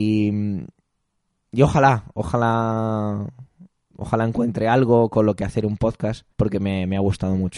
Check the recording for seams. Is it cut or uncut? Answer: cut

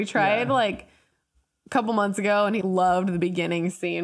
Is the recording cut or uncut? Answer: cut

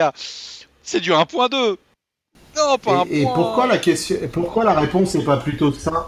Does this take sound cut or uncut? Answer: uncut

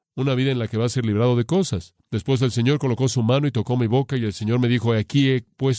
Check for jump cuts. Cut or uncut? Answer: uncut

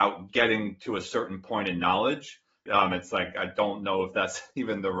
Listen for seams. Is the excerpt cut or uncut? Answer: cut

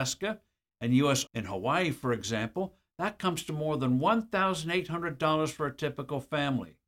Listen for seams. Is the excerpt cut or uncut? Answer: cut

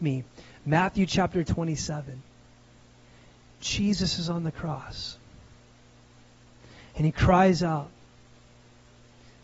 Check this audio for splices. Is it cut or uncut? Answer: uncut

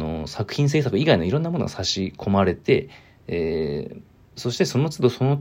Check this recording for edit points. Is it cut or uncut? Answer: uncut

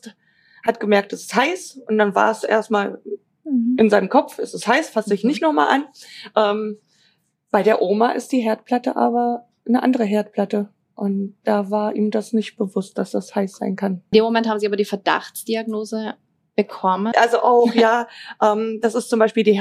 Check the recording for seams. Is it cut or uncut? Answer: cut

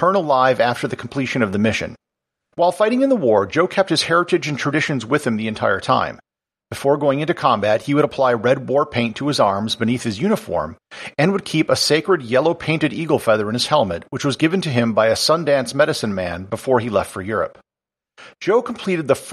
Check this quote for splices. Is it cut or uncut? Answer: cut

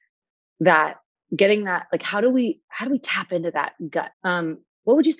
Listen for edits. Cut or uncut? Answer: cut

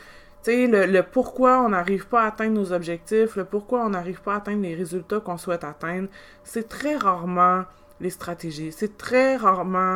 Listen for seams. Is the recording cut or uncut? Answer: uncut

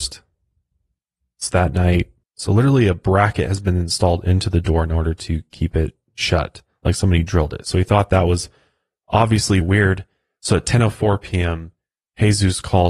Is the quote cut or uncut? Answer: cut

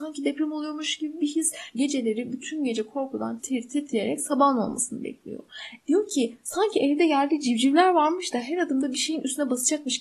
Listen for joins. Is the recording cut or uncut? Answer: cut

